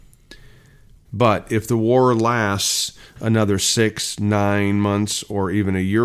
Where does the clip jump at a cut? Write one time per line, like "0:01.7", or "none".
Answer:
0:01.1